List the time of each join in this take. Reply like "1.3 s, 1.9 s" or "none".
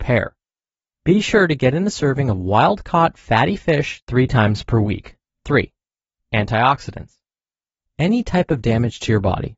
5.4 s